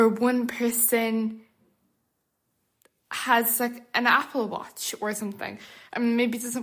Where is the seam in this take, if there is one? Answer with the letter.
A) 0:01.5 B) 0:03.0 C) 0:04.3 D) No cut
D